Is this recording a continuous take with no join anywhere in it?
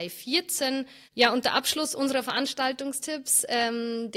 no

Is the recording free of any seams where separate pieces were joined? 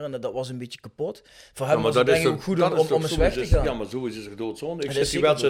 yes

